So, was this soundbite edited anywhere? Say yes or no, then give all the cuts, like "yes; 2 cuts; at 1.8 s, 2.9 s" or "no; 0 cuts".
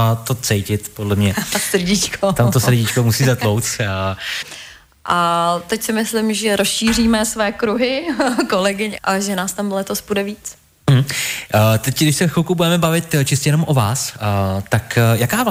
yes; 2 cuts; at 4.4 s, 9.0 s